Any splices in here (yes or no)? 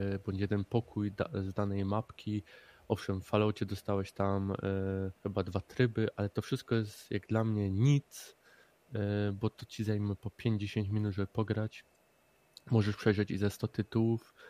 yes